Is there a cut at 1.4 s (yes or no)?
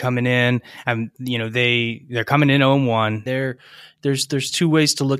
no